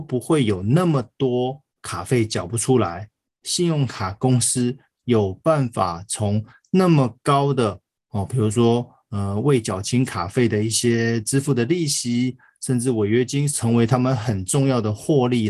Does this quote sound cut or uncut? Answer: cut